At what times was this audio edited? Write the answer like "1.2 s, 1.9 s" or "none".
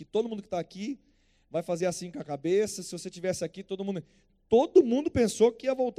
none